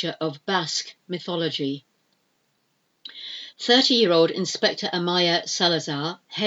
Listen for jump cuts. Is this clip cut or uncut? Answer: uncut